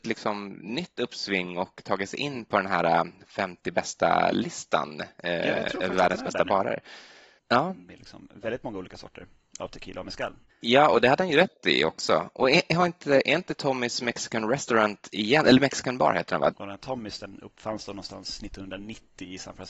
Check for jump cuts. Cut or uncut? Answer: cut